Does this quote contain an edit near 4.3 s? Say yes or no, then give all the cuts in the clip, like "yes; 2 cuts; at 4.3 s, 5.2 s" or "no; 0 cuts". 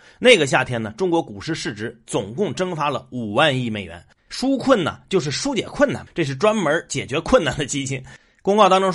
yes; 2 cuts; at 4.3 s, 6.1 s